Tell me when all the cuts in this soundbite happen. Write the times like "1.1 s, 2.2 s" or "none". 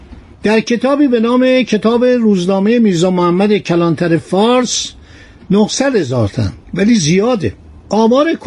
6.6 s